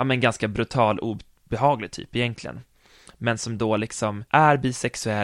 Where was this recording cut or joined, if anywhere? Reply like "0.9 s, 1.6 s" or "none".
4.3 s